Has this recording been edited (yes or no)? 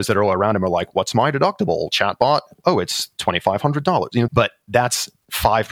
yes